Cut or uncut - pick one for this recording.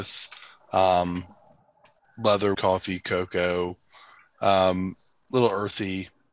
cut